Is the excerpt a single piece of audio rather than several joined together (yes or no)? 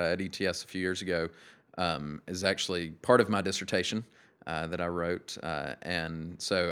yes